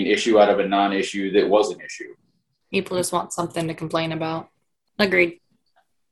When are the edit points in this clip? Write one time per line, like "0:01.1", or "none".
0:04.9